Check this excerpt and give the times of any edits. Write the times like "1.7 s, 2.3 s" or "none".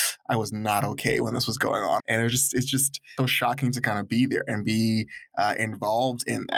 2.0 s, 3.2 s